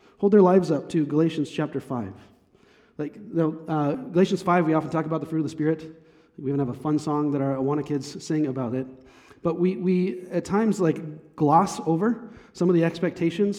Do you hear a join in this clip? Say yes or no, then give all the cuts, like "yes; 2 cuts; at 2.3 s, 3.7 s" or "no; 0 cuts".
no; 0 cuts